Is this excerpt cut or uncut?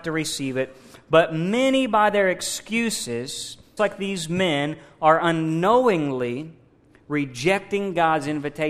cut